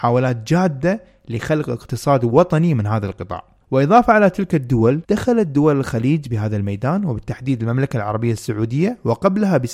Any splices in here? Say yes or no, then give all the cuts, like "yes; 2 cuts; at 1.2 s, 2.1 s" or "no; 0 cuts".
yes; 2 cuts; at 3.6 s, 5.0 s